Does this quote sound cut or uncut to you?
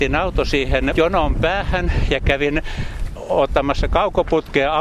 cut